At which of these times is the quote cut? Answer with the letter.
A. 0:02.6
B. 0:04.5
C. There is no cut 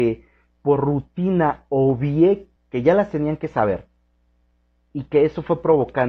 A